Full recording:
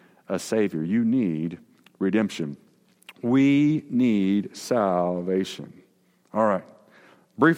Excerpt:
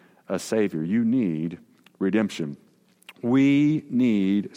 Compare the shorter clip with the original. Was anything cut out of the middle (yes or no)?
no